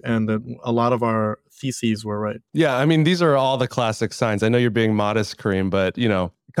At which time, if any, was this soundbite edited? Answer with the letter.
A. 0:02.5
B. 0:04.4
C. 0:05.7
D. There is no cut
A